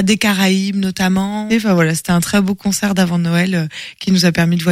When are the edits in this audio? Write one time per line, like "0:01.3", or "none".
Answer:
0:01.5